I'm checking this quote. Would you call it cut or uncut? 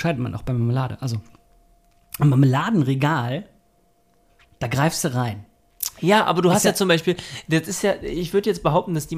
uncut